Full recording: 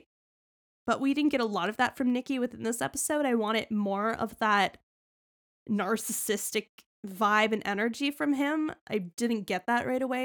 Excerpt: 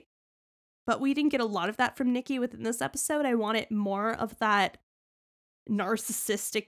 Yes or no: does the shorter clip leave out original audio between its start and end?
no